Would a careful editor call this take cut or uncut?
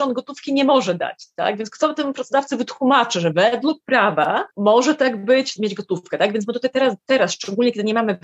cut